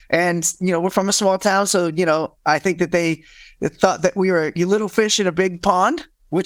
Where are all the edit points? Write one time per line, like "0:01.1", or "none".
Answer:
none